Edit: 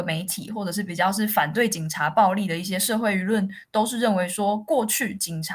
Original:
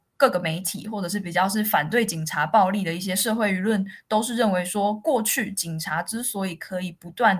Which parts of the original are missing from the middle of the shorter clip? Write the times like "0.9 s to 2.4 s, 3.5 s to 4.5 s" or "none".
none